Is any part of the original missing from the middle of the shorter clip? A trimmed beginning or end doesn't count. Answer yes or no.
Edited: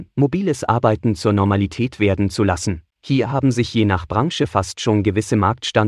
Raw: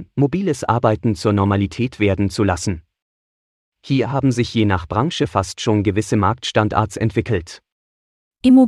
yes